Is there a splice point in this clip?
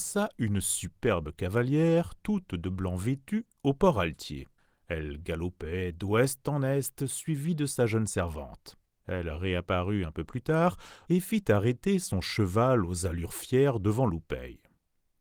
yes; 1 cut; at 11.1 s

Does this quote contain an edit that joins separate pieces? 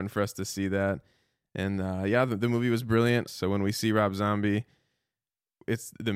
yes; 1 cut; at 3.3 s

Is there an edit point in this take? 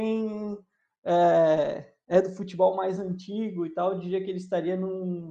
no; 0 cuts

